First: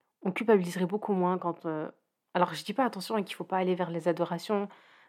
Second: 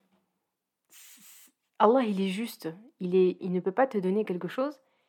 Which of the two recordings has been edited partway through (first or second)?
second